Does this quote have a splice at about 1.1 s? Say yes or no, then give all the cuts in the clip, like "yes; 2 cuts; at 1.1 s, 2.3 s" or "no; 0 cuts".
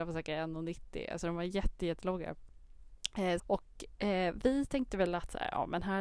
no; 1 cut; at 3.4 s